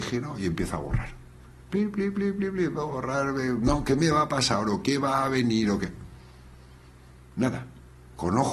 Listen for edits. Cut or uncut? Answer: uncut